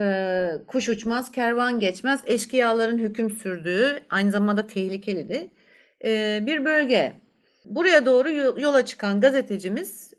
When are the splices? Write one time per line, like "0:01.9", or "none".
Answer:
none